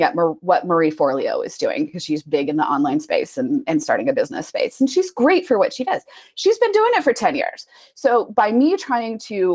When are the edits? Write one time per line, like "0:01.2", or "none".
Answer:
none